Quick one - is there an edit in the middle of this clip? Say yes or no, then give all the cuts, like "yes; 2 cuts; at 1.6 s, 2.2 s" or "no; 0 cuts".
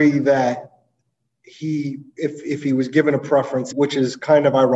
yes; 1 cut; at 3.7 s